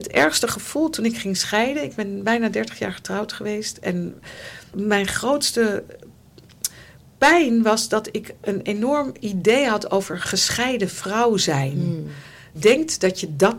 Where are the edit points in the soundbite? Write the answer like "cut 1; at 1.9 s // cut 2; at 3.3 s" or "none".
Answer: cut 1; at 12.5 s